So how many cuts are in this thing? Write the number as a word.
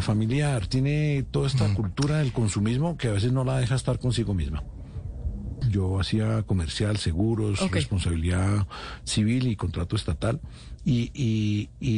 one